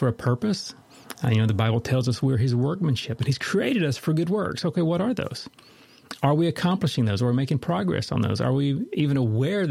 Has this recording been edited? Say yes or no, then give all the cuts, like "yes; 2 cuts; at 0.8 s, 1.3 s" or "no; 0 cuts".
no; 0 cuts